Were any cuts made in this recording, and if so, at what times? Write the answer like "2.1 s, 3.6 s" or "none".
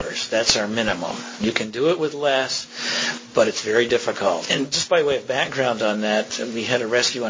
4.5 s